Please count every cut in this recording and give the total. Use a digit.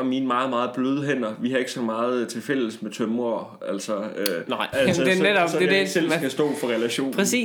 1